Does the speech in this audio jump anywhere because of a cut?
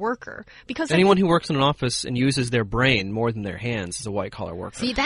no; 0 cuts

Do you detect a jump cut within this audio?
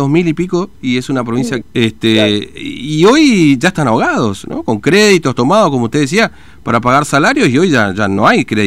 yes; 1 cut; at 1.6 s

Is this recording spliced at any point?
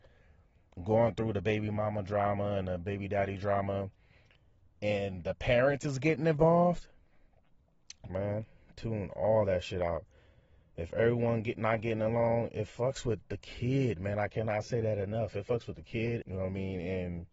yes; 2 cuts; at 8.1 s, 16.2 s

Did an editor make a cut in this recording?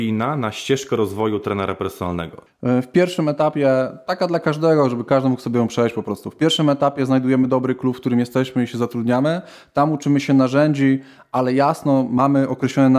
yes; 1 cut; at 2.5 s

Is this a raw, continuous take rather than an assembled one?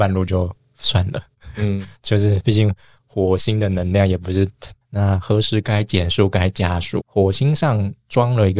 no; 2 cuts; at 4.8 s, 7.0 s

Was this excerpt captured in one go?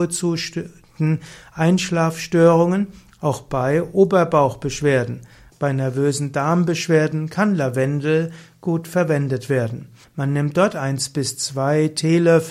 no; 2 cuts; at 5.5 s, 10.0 s

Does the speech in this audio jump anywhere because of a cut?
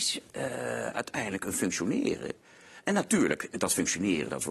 no; 0 cuts

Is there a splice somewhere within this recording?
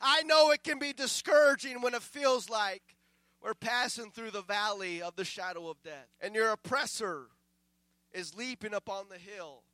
yes; 1 cut; at 6.1 s

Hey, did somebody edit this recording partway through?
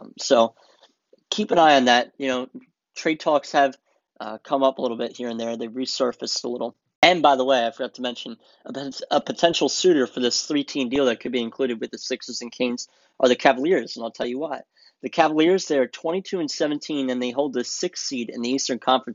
no; 0 cuts

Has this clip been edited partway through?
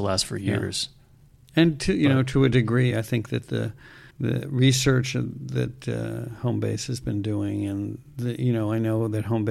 yes; 2 cuts; at 2.9 s, 4.1 s

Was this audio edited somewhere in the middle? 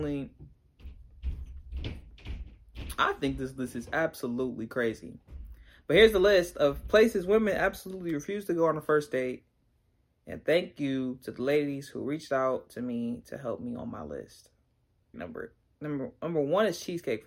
yes; 1 cut; at 15.1 s

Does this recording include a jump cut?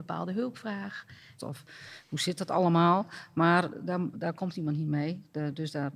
yes; 2 cuts; at 1.4 s, 4.1 s

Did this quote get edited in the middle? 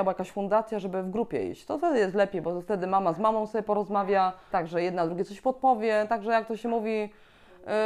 yes; 1 cut; at 4.5 s

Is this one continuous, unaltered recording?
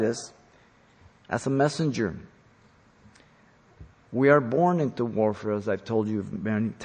no; 1 cut; at 4.0 s

